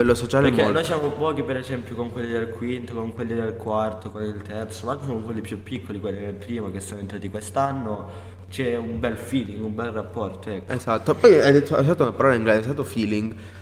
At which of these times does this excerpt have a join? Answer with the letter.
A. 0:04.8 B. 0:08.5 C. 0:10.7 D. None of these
D